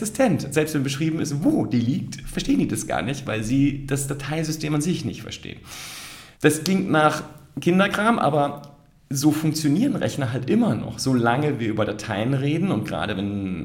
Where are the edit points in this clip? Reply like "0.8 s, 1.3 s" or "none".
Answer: 6.3 s